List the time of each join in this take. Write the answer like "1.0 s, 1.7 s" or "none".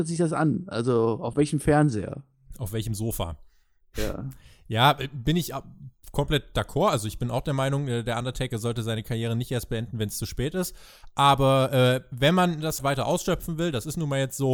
12.8 s